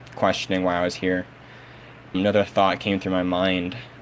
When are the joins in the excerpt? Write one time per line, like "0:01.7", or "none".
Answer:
0:02.1